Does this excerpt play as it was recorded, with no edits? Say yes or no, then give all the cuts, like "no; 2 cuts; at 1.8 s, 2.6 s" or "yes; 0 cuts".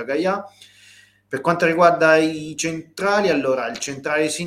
yes; 0 cuts